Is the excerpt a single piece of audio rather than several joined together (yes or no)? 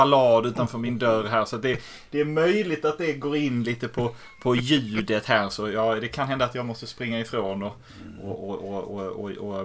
yes